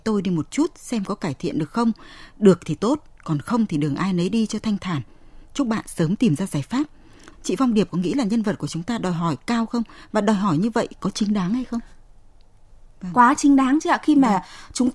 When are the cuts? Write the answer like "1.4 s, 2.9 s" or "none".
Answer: 7.3 s

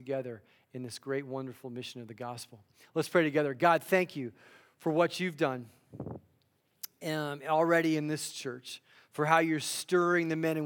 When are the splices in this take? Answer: none

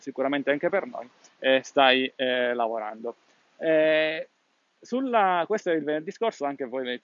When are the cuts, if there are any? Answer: none

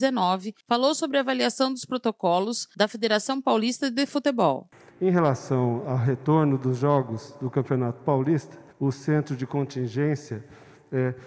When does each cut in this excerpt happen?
5.8 s, 8.7 s

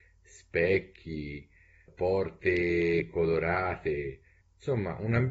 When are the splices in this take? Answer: 1.9 s

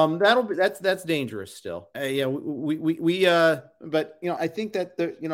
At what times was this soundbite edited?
1.9 s, 4.4 s

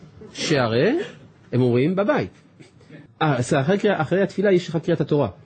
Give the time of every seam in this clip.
3.1 s

